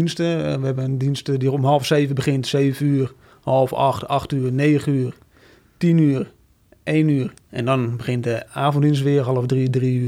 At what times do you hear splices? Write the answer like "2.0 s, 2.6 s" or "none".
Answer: 7.4 s